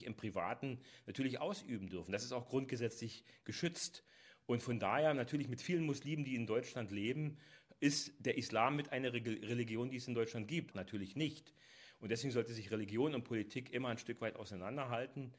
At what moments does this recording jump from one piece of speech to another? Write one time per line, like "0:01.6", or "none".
0:10.7